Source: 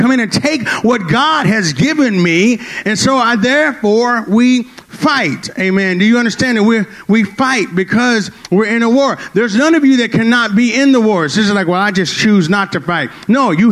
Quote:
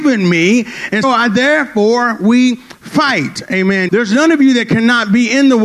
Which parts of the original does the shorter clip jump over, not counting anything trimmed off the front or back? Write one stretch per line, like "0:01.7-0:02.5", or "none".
0:03.0-0:03.1
0:06.0-0:09.3